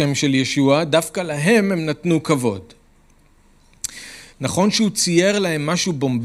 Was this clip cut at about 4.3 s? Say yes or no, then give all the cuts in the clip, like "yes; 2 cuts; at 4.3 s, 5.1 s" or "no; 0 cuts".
yes; 1 cut; at 4.3 s